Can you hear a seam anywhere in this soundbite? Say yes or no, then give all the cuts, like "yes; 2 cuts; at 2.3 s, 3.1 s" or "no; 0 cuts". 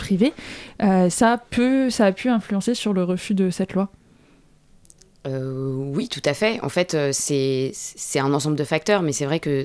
no; 0 cuts